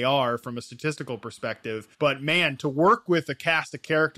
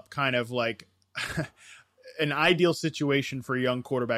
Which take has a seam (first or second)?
first